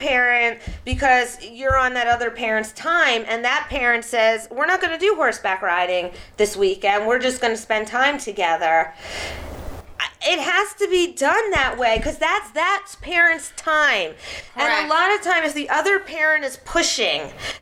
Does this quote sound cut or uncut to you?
uncut